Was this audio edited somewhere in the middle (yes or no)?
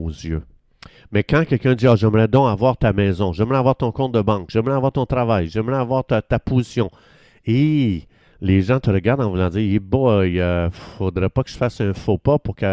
no